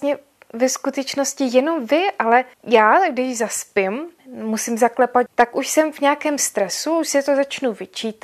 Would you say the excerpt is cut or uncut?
cut